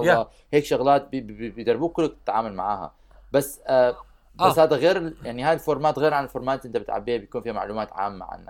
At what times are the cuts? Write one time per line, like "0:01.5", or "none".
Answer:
none